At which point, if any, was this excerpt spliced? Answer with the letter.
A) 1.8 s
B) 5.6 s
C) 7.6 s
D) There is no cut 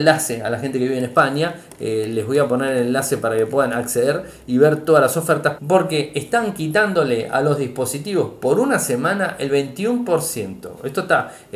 B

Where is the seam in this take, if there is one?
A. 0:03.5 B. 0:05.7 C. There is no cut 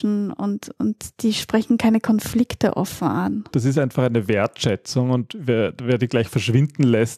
A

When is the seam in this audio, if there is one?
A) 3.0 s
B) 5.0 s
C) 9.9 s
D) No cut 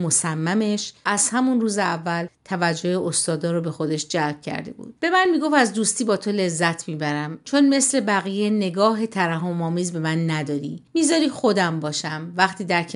B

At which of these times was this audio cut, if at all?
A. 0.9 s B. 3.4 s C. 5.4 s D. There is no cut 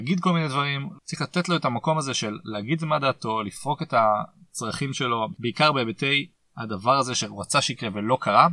A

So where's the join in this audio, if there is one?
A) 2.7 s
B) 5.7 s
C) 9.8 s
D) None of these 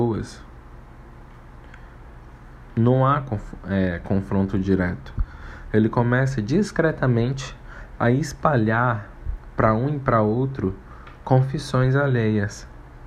A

